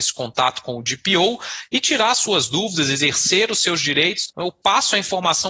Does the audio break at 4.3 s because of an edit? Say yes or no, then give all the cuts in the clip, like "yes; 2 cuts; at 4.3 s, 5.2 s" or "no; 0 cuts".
yes; 1 cut; at 4.3 s